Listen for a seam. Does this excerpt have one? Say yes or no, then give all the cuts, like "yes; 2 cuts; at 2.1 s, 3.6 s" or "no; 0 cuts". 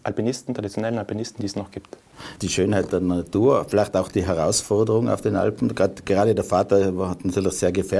yes; 1 cut; at 2.4 s